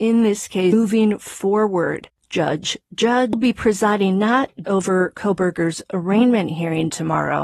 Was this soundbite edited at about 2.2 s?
no; 1 cut; at 4.6 s

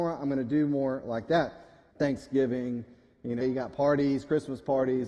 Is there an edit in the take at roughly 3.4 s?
yes; 2 cuts; at 1.9 s, 3.4 s

